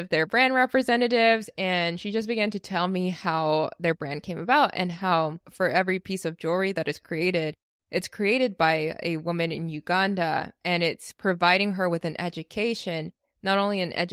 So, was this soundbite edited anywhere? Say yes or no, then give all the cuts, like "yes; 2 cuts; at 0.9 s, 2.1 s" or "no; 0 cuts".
no; 0 cuts